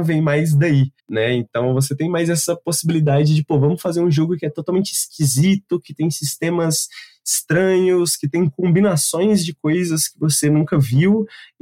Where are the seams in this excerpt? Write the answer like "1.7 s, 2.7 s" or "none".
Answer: 1.0 s